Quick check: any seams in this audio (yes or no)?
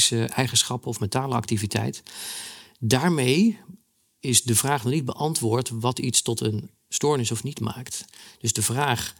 no